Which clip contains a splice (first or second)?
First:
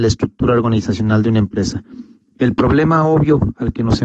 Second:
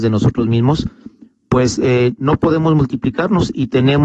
first